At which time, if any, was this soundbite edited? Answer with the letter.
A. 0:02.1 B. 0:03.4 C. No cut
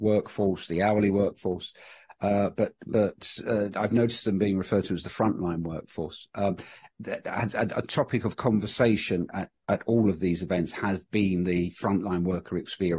C